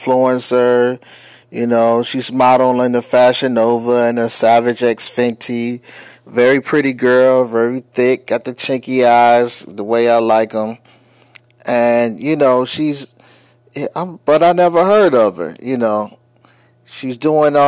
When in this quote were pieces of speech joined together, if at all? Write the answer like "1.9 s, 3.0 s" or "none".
none